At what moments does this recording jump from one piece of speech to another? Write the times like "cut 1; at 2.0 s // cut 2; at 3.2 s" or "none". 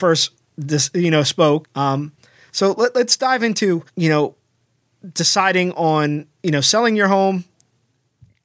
cut 1; at 1.6 s // cut 2; at 3.9 s // cut 3; at 6.4 s